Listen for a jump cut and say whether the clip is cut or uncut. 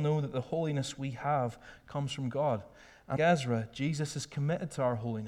cut